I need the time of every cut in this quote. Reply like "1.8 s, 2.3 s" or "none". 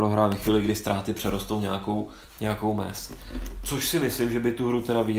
none